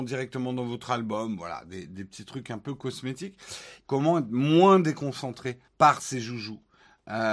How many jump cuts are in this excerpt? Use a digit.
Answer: 2